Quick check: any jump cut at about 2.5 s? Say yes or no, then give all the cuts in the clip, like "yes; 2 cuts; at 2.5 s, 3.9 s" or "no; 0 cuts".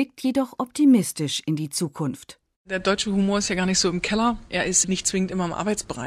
no; 1 cut; at 4.8 s